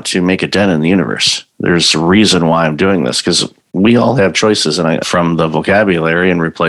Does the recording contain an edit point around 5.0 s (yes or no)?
yes